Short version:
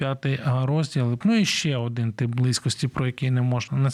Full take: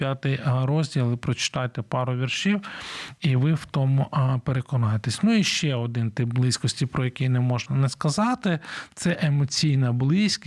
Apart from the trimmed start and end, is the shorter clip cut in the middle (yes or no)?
yes